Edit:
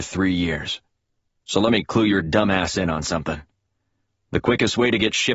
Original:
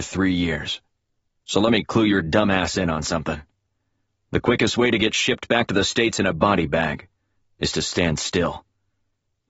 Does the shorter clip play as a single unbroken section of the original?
yes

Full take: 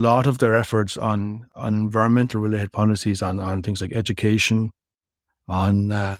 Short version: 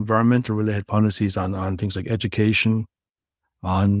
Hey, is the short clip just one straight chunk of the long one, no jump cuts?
yes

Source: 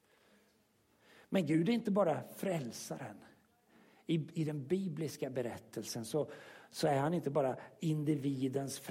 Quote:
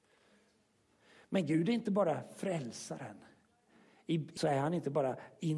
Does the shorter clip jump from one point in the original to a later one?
yes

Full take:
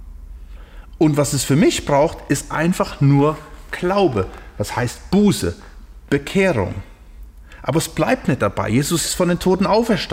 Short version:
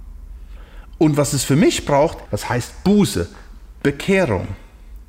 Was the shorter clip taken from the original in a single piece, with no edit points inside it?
no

